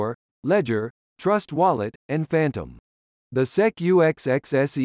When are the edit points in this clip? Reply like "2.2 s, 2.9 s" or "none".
3.1 s